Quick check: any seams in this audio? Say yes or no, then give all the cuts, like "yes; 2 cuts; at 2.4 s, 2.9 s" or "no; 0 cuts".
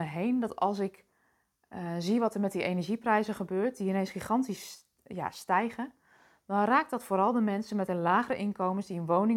no; 0 cuts